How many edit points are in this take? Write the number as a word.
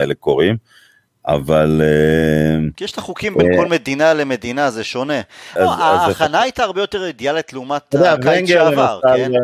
one